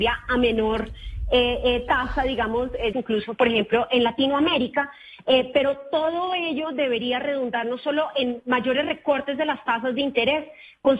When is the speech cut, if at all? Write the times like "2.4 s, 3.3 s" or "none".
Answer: 2.9 s